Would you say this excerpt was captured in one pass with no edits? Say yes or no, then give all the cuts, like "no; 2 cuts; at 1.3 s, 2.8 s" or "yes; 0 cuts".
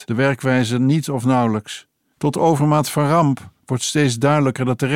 no; 1 cut; at 2.1 s